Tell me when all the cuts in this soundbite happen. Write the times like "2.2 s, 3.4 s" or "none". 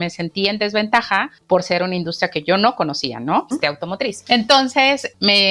3.5 s